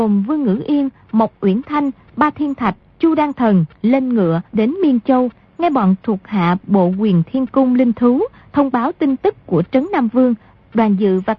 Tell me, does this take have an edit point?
yes; 2 cuts; at 2.1 s, 4.5 s

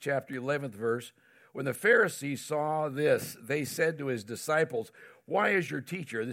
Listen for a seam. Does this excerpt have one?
no; 0 cuts

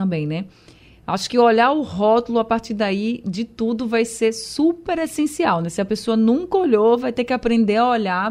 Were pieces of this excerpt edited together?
no; 0 cuts

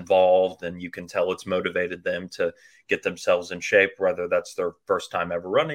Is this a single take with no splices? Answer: yes; 0 cuts

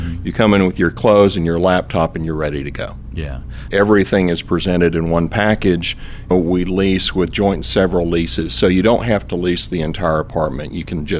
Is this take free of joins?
no; 2 cuts; at 3.7 s, 6.3 s

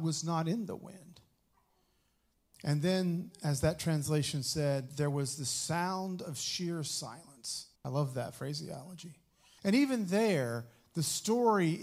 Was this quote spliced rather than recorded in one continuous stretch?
yes; 2 cuts; at 7.8 s, 9.6 s

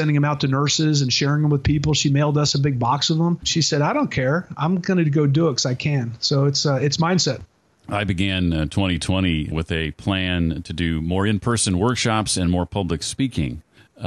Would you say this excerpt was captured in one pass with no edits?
no; 2 cuts; at 3.4 s, 9.5 s

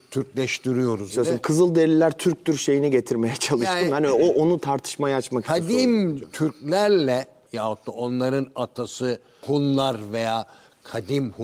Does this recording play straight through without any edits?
no; 1 cut; at 1.1 s

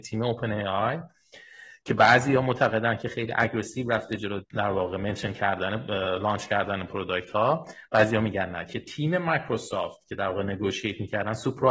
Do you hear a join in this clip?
yes; 1 cut; at 4.4 s

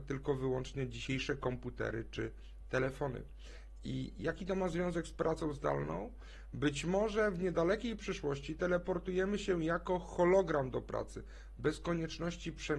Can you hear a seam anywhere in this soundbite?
no; 0 cuts

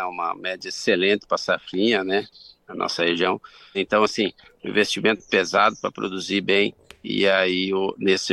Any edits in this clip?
yes; 1 cut; at 3.7 s

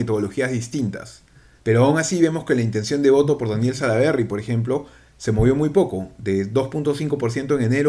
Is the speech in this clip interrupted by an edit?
yes; 1 cut; at 1.6 s

